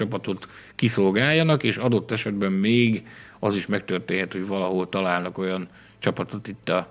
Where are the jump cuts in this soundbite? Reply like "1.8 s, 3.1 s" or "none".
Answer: none